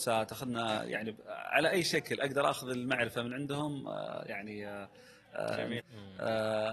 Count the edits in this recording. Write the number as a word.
one